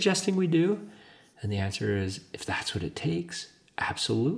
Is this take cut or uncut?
uncut